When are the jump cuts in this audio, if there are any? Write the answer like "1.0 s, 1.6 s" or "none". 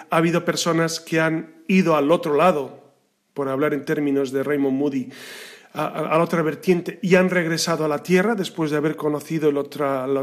none